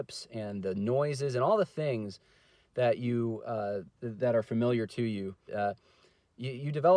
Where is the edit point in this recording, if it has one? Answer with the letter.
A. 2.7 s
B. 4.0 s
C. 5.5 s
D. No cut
C